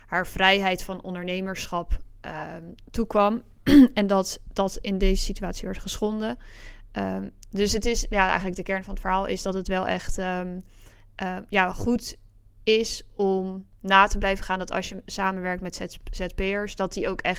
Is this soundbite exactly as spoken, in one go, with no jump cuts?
yes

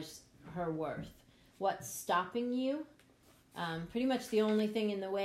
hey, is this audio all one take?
no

